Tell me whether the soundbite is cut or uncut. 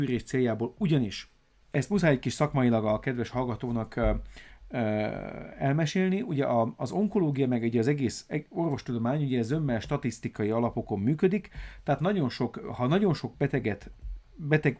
uncut